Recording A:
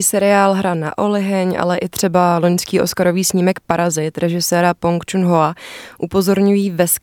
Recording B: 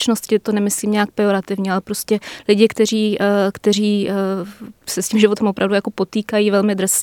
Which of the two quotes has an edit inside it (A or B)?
B